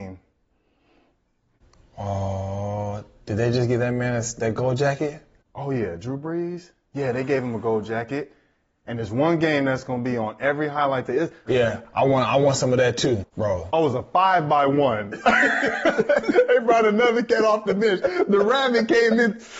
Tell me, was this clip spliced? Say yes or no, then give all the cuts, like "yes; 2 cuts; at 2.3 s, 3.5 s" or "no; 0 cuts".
yes; 2 cuts; at 11.5 s, 13.2 s